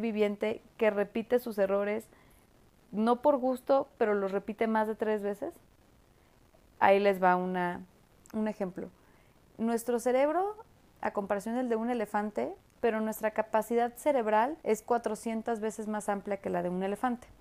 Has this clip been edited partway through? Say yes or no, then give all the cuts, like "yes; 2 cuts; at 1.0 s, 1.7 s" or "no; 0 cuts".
yes; 2 cuts; at 12.6 s, 14.6 s